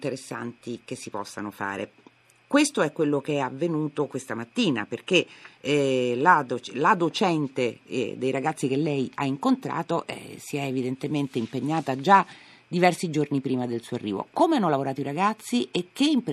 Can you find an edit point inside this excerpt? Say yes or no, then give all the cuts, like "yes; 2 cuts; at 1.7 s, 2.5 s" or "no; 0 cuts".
no; 0 cuts